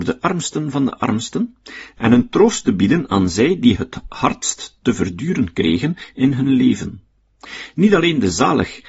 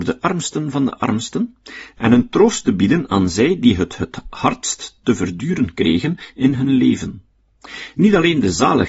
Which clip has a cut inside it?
first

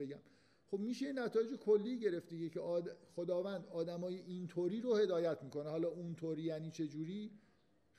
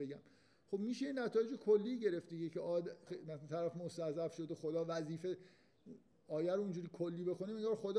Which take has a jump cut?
second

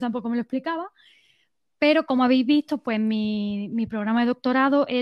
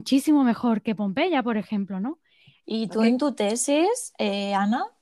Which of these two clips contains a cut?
second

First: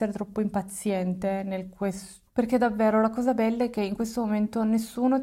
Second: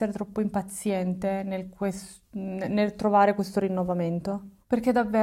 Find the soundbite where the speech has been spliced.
first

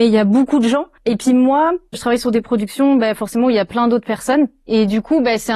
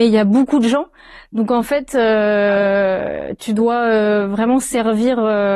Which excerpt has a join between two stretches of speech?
first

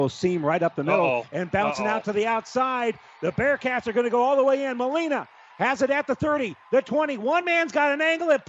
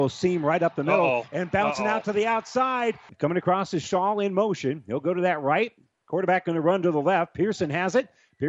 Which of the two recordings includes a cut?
second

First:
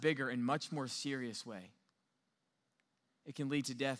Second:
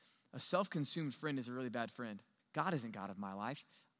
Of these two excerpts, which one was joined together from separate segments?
second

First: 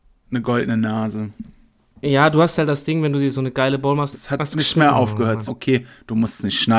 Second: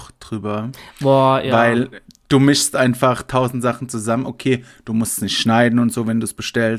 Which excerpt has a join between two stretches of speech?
first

